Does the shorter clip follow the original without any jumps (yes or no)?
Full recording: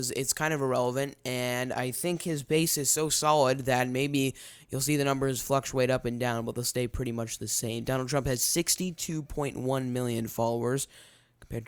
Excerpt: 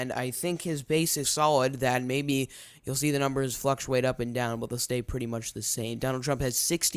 no